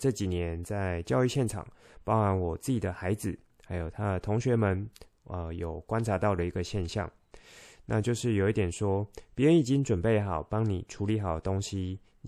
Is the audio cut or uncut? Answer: uncut